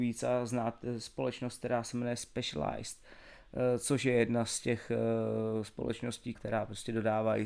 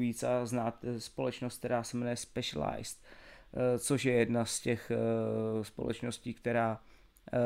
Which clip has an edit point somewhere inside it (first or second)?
first